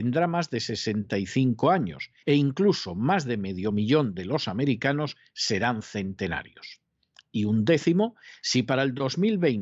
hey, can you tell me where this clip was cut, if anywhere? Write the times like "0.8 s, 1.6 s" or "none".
2.2 s